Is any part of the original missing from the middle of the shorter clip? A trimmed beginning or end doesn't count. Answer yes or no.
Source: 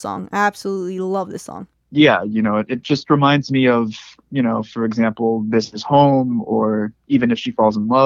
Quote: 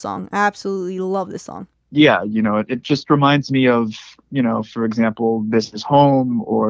no